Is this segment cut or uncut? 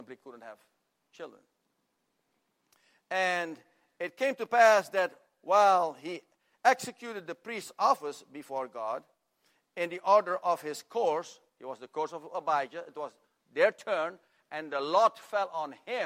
uncut